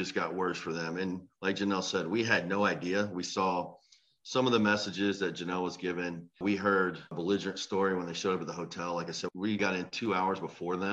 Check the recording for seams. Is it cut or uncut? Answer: cut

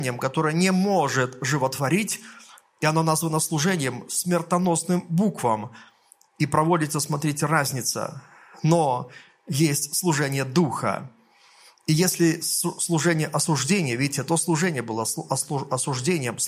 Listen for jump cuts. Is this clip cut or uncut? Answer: uncut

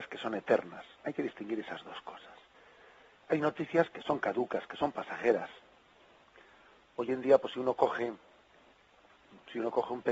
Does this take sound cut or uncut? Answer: uncut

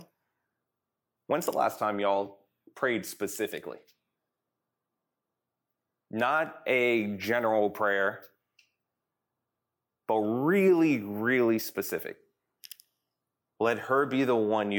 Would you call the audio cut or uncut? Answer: cut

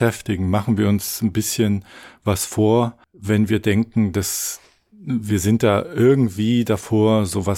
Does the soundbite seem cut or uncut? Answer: uncut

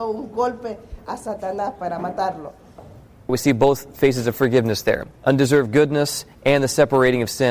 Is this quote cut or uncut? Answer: cut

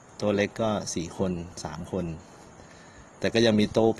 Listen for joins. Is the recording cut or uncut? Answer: cut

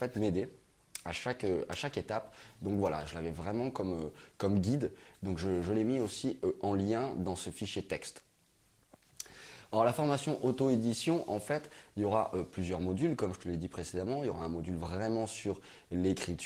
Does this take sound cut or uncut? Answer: uncut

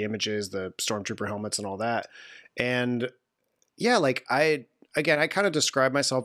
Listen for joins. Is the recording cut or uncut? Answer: uncut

